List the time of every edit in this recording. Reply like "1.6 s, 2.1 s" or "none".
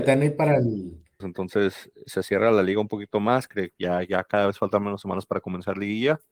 1.2 s